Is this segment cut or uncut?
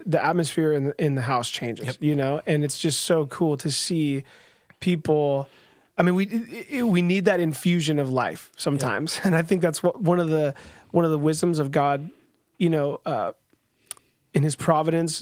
uncut